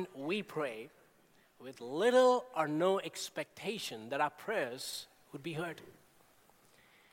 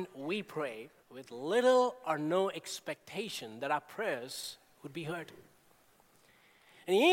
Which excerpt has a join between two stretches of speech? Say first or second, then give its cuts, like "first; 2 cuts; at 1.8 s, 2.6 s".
second; 1 cut; at 1.0 s